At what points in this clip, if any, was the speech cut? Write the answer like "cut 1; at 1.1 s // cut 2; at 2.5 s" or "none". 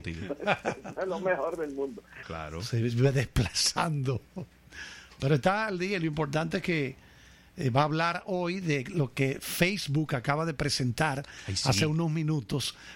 cut 1; at 2.2 s